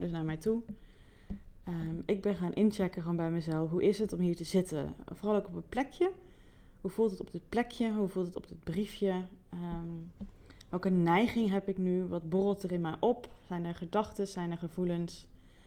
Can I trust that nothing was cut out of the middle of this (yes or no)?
yes